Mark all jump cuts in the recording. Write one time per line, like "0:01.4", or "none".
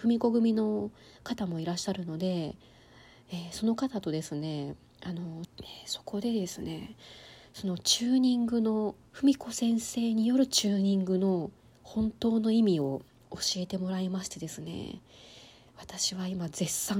0:05.4
0:09.1